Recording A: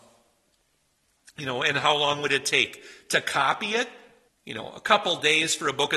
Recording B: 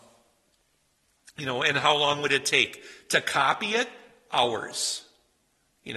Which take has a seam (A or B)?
A